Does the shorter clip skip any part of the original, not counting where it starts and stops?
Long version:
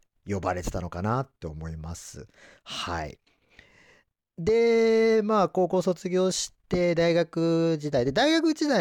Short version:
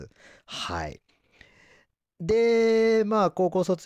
no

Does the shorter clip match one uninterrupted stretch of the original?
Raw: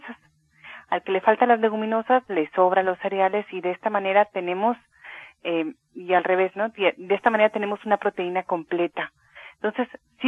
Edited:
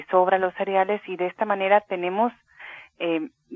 yes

